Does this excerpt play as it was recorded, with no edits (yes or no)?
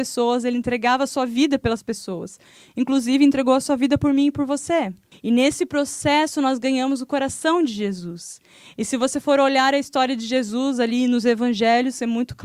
no